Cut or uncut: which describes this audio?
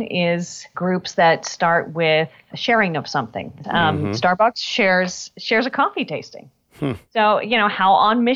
cut